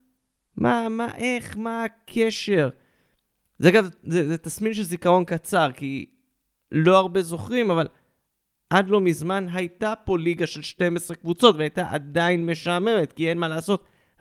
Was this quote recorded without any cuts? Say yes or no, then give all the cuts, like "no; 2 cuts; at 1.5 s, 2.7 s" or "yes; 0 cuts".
yes; 0 cuts